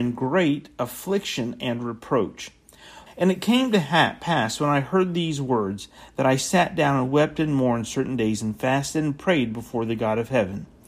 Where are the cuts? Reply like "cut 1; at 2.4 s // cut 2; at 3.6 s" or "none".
cut 1; at 3.1 s